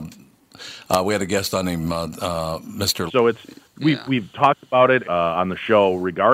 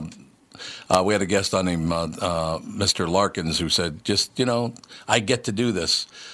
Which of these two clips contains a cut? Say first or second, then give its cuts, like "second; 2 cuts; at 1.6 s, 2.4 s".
first; 2 cuts; at 3.1 s, 5.0 s